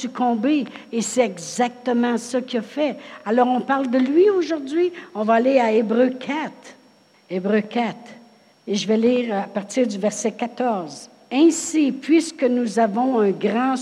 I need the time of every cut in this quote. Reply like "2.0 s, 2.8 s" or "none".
none